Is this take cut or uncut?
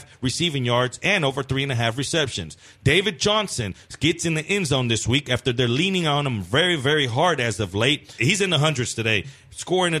cut